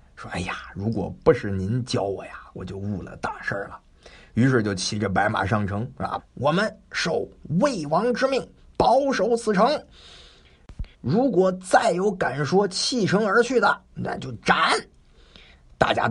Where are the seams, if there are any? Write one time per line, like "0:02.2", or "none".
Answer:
0:06.2
0:10.9